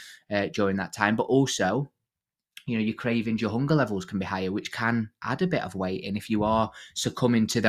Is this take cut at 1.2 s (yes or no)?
no